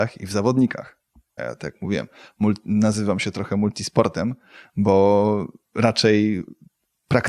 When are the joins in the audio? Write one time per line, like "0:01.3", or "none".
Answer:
0:01.4